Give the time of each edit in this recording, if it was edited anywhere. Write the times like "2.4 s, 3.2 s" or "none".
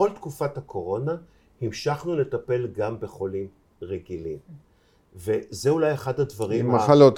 none